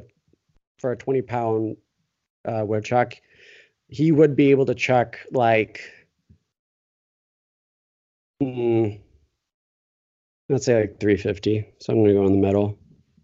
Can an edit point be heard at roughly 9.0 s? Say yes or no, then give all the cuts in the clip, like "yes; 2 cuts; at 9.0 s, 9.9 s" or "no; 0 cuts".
no; 0 cuts